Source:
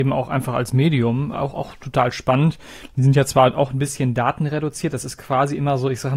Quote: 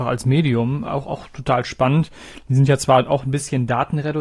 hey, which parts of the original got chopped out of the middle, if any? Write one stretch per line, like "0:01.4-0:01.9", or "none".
none